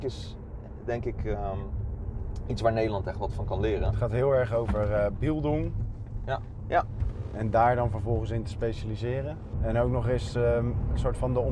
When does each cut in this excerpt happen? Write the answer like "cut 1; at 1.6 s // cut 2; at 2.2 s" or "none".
cut 1; at 6.6 s // cut 2; at 9.5 s